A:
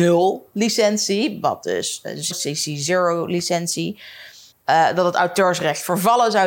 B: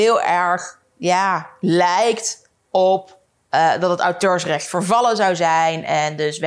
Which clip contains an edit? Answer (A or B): A